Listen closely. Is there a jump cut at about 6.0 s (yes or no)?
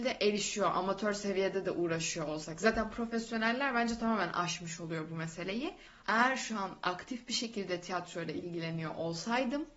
yes